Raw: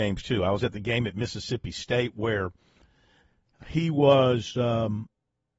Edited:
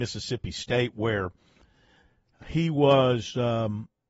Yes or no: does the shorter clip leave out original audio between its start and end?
no